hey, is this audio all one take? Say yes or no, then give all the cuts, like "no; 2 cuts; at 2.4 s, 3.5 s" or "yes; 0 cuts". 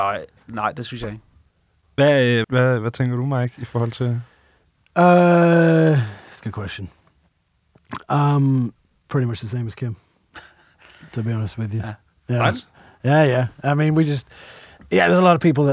no; 1 cut; at 2.4 s